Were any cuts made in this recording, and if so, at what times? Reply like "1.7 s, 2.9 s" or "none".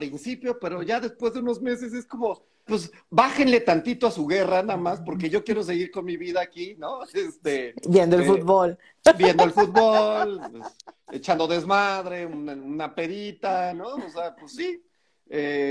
2.7 s